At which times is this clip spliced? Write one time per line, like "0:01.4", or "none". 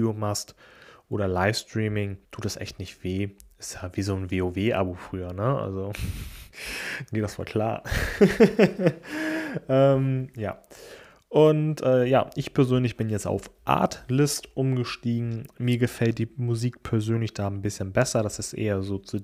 0:02.2